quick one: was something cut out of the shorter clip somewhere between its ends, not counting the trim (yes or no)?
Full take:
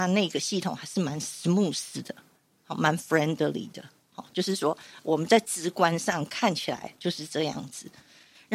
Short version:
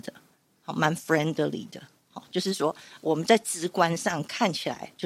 no